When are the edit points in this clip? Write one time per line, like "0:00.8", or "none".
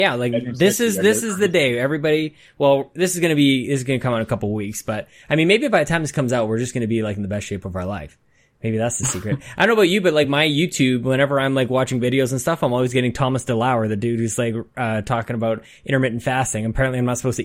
none